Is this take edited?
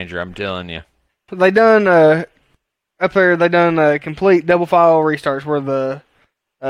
yes; 1 cut; at 1.3 s

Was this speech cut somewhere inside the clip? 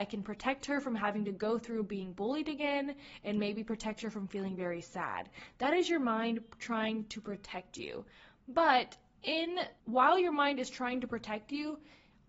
yes; 1 cut; at 9.8 s

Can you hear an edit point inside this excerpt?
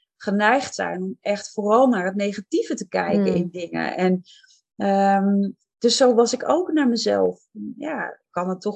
no; 0 cuts

